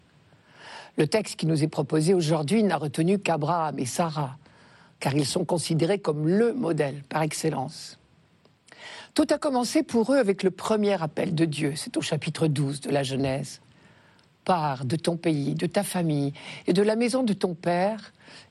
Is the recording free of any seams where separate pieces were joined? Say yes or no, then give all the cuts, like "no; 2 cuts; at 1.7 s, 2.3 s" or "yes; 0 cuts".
yes; 0 cuts